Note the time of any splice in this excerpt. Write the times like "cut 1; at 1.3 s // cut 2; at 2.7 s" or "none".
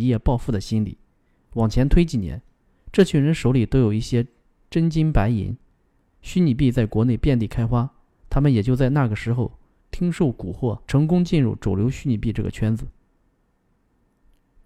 cut 1; at 6.0 s // cut 2; at 10.9 s